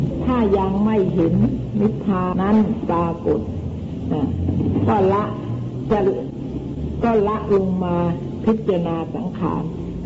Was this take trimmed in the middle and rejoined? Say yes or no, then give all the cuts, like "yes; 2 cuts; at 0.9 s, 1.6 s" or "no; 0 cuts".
yes; 1 cut; at 2.3 s